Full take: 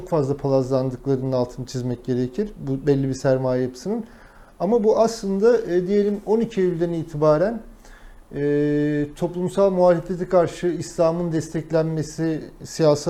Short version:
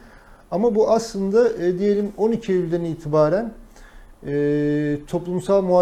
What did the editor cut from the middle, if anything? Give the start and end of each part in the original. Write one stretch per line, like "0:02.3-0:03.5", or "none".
none